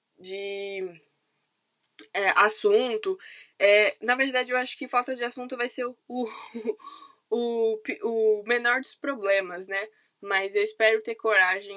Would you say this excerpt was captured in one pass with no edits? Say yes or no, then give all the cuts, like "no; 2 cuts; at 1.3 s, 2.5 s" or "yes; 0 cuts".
yes; 0 cuts